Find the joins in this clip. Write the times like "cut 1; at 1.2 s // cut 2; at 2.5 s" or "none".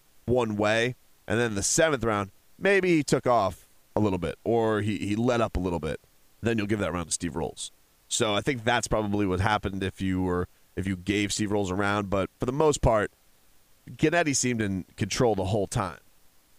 cut 1; at 1.1 s // cut 2; at 6.4 s